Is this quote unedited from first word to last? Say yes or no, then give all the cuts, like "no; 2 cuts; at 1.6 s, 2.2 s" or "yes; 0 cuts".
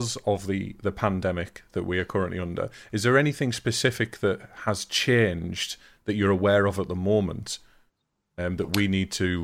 yes; 0 cuts